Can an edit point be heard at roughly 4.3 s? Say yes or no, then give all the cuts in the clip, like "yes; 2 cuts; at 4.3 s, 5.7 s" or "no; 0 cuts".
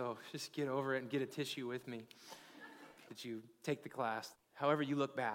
yes; 2 cuts; at 3.1 s, 4.3 s